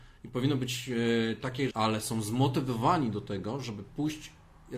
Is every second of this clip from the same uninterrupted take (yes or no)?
no